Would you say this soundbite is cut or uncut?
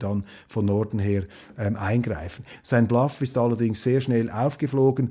cut